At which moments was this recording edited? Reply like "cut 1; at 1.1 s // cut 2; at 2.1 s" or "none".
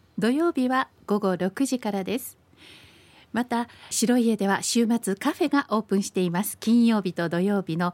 cut 1; at 3.9 s